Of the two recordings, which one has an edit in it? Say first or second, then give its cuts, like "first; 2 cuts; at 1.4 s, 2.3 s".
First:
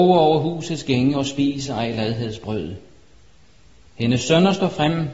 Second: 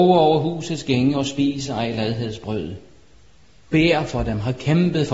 second; 1 cut; at 3.6 s